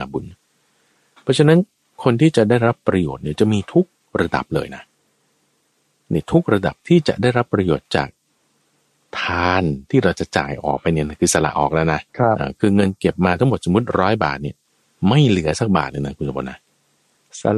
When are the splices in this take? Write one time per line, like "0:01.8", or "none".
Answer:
0:12.1